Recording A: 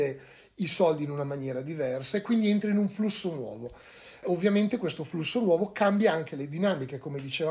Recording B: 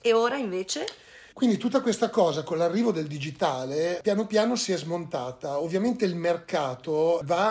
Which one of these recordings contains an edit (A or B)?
B